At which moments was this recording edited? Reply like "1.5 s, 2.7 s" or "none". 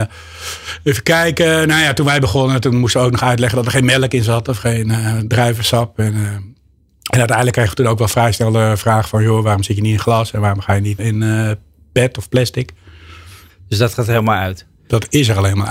11.0 s, 13.5 s